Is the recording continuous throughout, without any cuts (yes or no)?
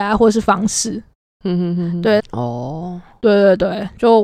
no